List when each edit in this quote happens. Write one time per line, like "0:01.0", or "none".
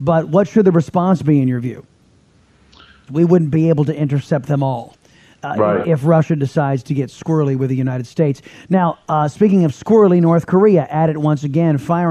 0:03.1